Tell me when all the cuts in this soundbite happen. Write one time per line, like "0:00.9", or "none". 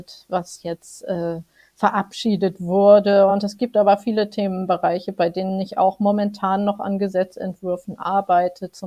none